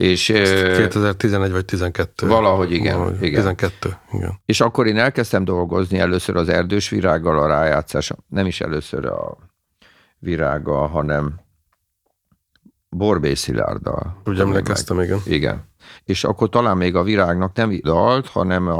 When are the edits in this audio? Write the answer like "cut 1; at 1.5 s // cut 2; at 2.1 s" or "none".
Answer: cut 1; at 14.3 s // cut 2; at 15.9 s // cut 3; at 17.8 s

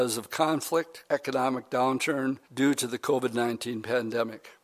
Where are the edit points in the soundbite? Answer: cut 1; at 1.1 s // cut 2; at 2.4 s

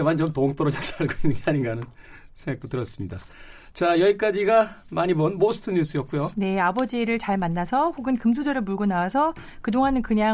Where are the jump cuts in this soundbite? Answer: cut 1; at 6.3 s

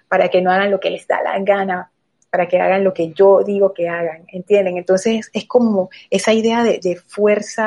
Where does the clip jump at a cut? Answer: none

